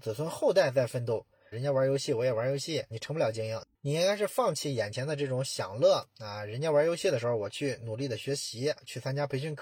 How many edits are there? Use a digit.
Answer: 2